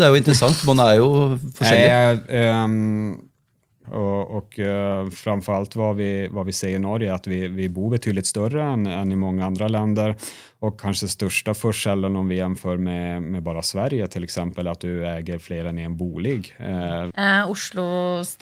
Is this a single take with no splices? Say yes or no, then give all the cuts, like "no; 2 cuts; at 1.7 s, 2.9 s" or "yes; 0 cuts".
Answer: no; 2 cuts; at 3.8 s, 17.1 s